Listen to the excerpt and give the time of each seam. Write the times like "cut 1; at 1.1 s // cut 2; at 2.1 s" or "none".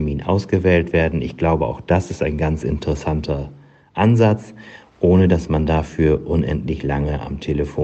none

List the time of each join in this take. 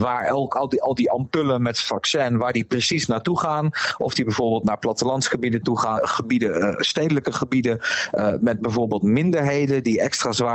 cut 1; at 6.0 s

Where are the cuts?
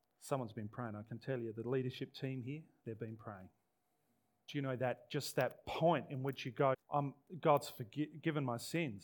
cut 1; at 4.5 s // cut 2; at 6.7 s

